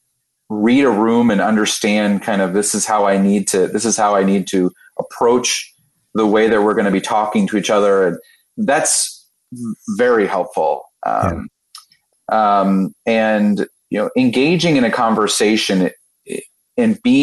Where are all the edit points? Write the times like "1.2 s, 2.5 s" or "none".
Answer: 12.1 s

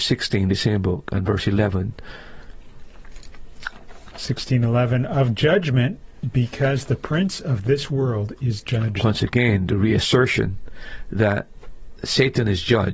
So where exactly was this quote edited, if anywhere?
none

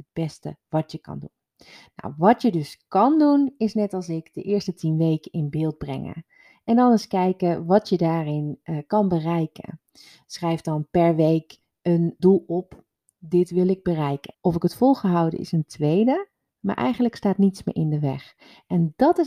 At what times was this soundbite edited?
12.2 s, 14.3 s

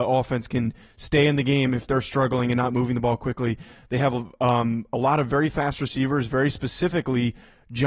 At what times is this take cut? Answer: none

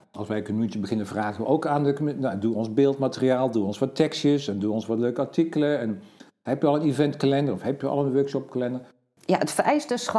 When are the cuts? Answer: 9.2 s

